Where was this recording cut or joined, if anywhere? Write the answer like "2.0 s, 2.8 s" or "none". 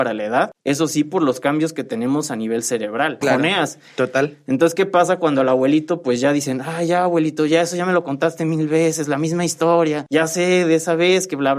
3.2 s